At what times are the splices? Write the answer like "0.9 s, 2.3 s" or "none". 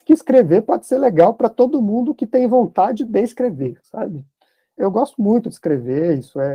4.8 s